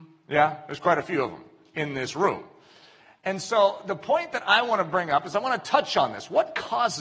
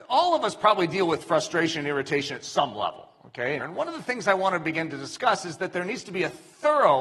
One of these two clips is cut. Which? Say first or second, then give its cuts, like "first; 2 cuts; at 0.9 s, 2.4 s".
second; 1 cut; at 3.6 s